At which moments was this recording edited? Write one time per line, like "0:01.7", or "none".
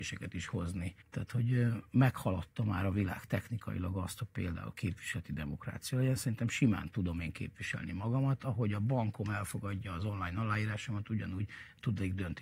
0:01.0